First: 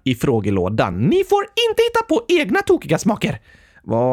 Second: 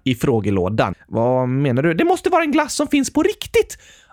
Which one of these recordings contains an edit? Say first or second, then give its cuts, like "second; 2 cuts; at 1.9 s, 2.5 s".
second; 1 cut; at 0.9 s